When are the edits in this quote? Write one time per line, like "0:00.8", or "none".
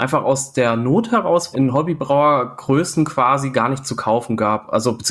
0:01.5